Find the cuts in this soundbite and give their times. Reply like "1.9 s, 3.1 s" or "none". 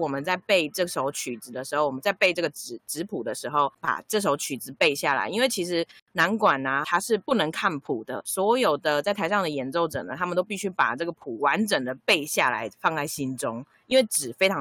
6.8 s